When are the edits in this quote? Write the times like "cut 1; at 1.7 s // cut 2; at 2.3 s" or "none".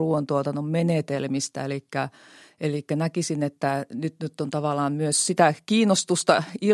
none